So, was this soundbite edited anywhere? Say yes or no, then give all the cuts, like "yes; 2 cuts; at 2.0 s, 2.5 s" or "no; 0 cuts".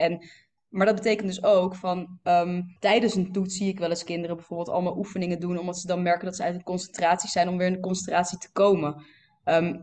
yes; 1 cut; at 2.8 s